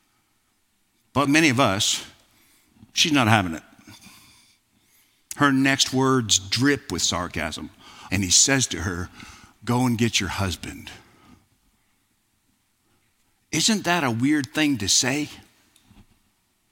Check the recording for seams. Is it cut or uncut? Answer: cut